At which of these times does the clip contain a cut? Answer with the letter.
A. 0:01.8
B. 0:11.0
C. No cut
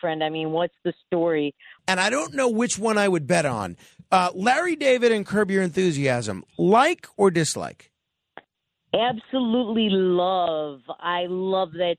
A